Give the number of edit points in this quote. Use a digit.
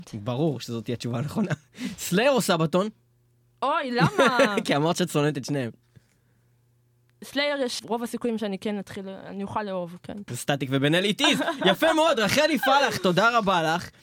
2